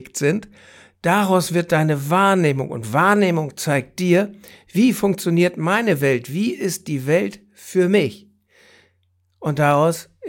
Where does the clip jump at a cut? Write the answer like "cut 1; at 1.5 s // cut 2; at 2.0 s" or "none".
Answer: none